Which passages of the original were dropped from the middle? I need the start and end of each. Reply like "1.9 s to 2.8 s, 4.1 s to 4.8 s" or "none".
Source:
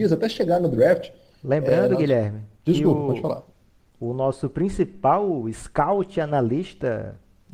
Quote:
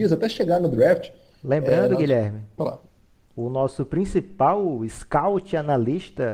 2.6 s to 3.2 s